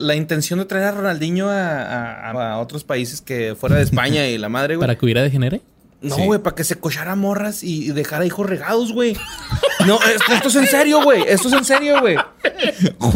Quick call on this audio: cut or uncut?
cut